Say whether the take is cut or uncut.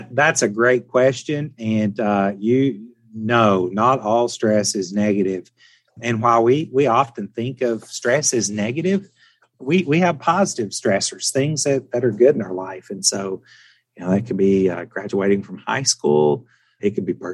uncut